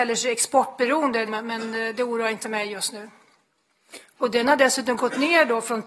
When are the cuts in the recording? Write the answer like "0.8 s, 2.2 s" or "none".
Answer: 1.3 s, 4.2 s